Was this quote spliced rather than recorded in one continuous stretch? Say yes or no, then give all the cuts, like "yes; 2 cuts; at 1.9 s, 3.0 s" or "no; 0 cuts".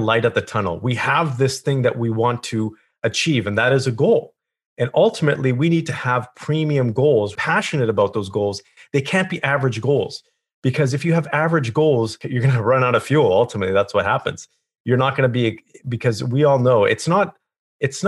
yes; 1 cut; at 7.4 s